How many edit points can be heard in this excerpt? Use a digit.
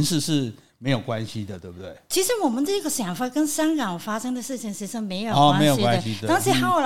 0